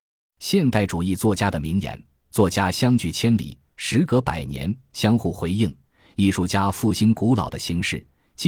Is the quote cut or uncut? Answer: uncut